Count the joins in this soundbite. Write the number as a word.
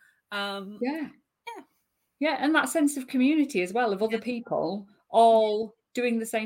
zero